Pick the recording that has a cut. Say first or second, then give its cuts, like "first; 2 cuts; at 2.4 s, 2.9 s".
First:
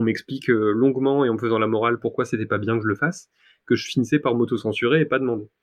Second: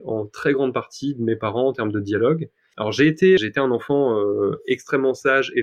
second; 1 cut; at 3.4 s